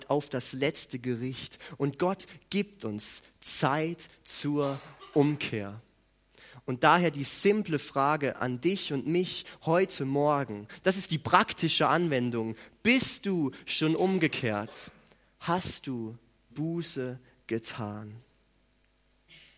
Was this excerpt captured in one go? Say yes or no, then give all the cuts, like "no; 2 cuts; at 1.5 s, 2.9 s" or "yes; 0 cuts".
no; 1 cut; at 16.5 s